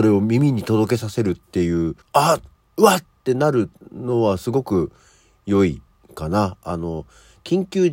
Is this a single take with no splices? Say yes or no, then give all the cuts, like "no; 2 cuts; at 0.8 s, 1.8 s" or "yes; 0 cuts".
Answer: no; 1 cut; at 2.0 s